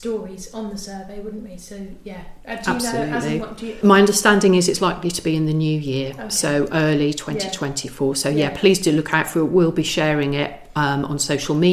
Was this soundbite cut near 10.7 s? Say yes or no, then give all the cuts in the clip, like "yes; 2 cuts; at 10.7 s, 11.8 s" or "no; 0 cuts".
no; 1 cut; at 3.8 s